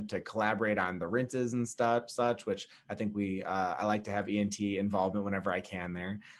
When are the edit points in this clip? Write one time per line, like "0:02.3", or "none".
none

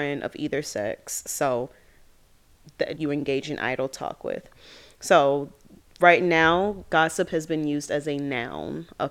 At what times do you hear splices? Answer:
0:03.0

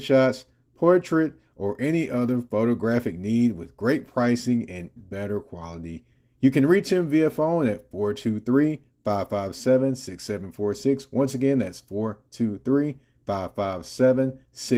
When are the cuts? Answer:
0:05.0

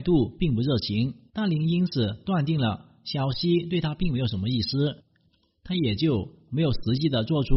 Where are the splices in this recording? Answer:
0:01.3

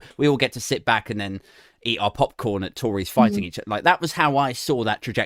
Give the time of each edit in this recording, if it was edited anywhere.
none

